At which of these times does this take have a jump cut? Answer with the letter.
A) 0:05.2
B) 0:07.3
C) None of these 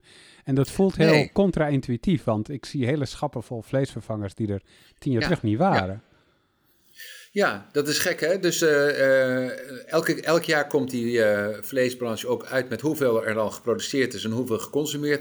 C